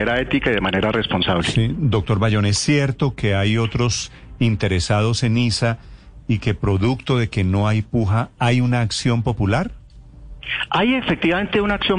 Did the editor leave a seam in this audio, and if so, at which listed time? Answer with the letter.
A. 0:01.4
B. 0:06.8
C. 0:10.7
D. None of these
D